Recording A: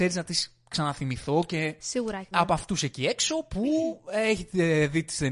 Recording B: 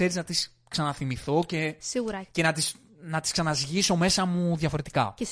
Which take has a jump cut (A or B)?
A